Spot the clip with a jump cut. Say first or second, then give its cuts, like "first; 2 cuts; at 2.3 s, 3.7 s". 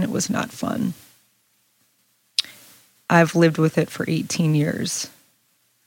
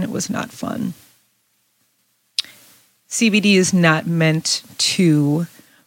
first; 1 cut; at 3.0 s